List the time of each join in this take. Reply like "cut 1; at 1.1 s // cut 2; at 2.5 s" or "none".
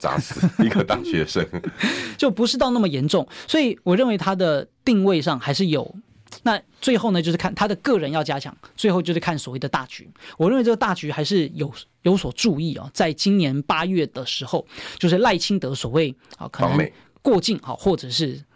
cut 1; at 6.4 s